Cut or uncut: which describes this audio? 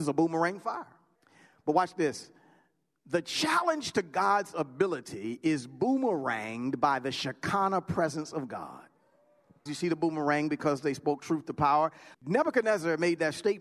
cut